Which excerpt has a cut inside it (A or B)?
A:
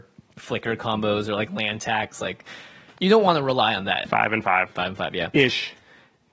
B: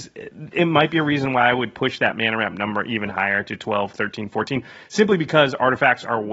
A